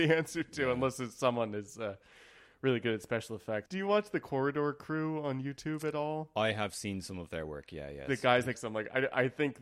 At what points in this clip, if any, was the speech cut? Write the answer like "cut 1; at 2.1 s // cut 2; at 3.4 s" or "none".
cut 1; at 3.7 s // cut 2; at 8.5 s